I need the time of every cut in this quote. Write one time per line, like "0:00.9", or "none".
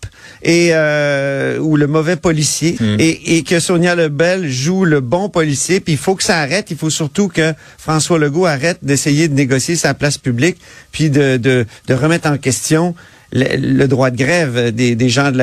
0:02.8

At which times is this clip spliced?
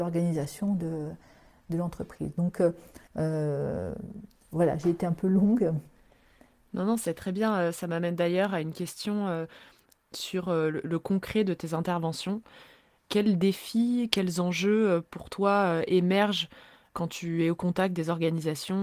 0:03.1

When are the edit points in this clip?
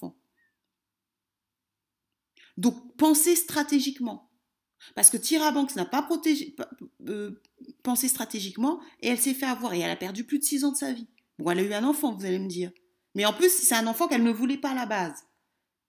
none

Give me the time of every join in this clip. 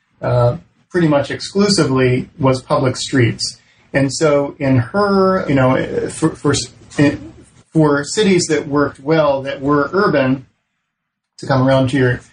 0:05.5

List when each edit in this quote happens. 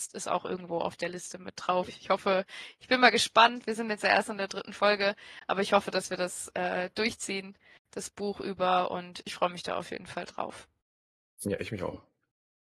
none

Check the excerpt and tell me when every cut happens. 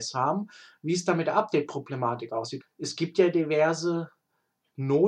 0:02.6

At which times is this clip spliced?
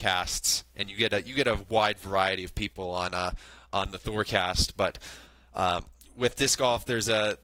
none

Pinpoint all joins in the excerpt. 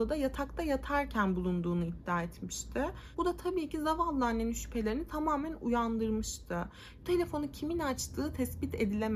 0:07.0

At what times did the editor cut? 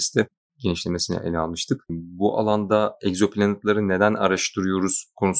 none

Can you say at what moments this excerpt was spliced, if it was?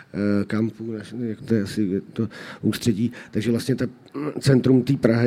0:01.4

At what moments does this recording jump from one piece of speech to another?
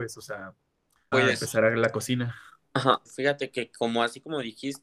0:01.1
0:03.0

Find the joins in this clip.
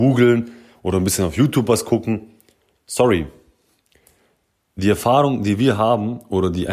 none

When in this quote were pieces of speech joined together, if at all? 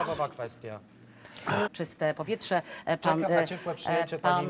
0:01.7

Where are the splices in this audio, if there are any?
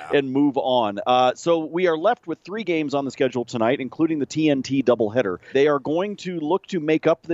0:05.5

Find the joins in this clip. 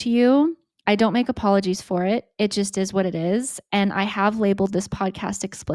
none

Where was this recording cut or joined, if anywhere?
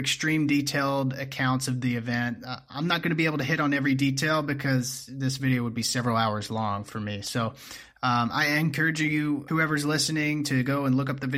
0:09.5

